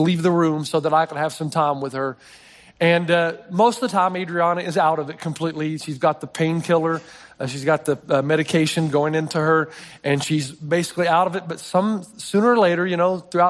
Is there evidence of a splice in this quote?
no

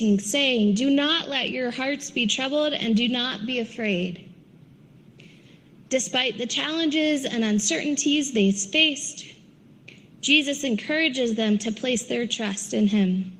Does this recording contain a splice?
no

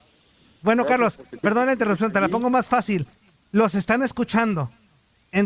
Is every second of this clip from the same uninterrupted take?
yes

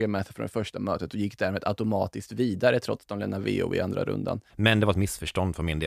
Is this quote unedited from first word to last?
no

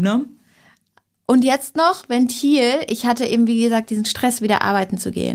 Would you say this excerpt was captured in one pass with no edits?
yes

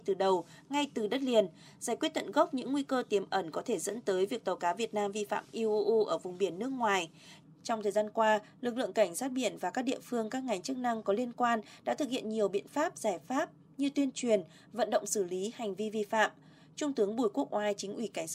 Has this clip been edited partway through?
yes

